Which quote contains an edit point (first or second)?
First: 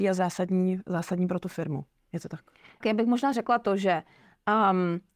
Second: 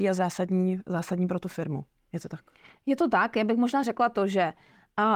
first